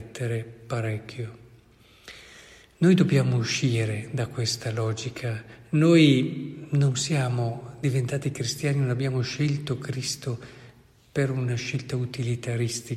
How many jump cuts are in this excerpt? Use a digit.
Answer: 0